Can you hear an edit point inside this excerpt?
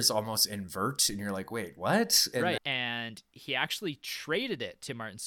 yes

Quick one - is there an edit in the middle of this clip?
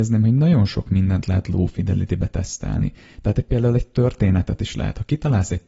no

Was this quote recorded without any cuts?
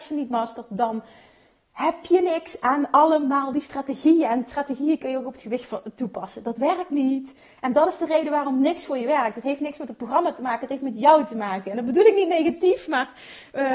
yes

